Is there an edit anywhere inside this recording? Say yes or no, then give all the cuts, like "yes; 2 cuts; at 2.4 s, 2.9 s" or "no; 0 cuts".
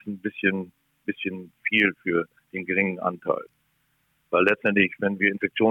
no; 0 cuts